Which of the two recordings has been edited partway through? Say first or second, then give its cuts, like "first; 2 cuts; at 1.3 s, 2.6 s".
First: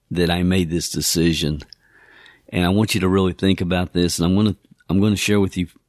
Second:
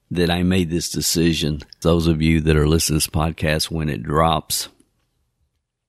second; 1 cut; at 1.8 s